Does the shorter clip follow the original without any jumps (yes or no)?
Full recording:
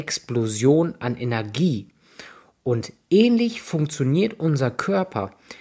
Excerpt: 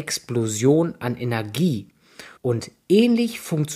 no